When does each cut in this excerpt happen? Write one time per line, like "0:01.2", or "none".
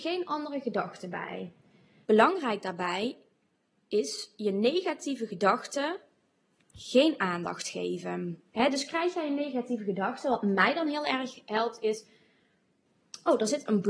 0:02.0
0:08.5